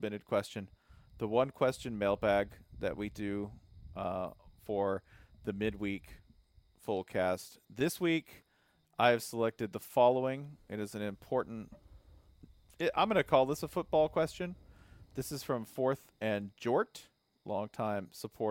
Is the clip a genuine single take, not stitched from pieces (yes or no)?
yes